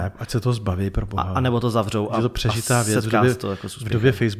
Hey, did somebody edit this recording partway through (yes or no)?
no